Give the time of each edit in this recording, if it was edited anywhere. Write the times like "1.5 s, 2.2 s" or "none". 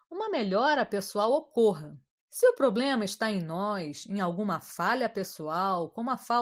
2.2 s